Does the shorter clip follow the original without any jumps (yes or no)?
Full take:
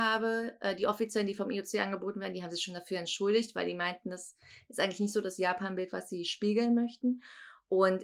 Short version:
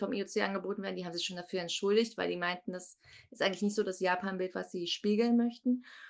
yes